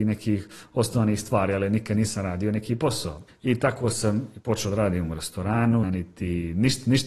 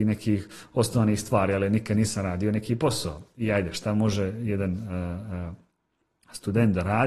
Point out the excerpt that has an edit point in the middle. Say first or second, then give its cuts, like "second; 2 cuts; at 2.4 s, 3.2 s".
first; 2 cuts; at 3.3 s, 5.8 s